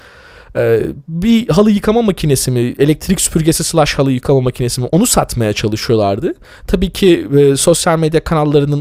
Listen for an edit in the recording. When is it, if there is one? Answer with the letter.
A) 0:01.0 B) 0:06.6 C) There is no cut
C